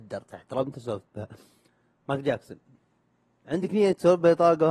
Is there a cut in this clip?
no; 0 cuts

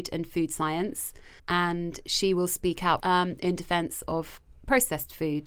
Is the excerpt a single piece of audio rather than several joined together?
no; 2 cuts; at 1.4 s, 3.0 s

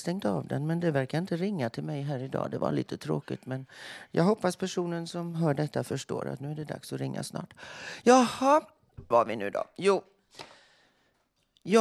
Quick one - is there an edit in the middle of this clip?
yes; 1 cut; at 9.1 s

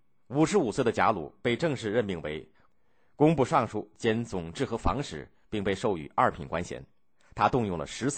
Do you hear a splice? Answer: no; 0 cuts

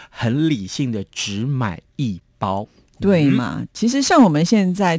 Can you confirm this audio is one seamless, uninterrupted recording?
yes; 0 cuts

